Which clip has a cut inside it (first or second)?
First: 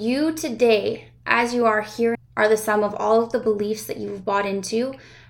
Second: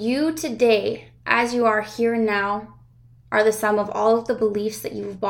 first